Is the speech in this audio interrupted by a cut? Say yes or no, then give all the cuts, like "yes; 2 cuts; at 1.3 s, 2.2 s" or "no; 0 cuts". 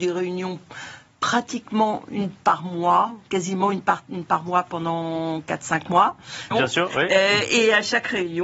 yes; 1 cut; at 6.5 s